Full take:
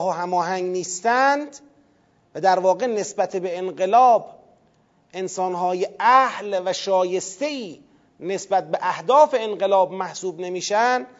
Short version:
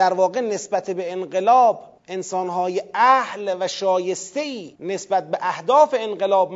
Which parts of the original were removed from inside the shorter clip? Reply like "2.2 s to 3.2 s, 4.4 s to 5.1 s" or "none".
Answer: 4.4 s to 5.0 s, 7.8 s to 8.2 s